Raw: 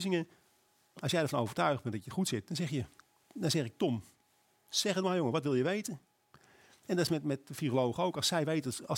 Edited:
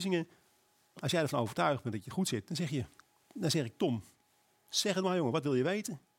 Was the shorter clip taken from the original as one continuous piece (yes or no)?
yes